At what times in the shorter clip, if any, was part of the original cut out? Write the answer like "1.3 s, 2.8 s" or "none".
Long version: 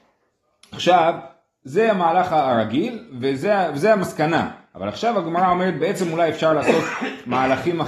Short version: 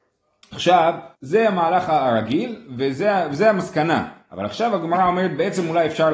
1.2 s